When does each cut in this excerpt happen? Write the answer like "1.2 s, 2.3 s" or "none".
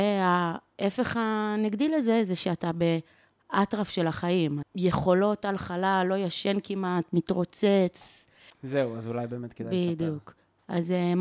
4.6 s, 8.5 s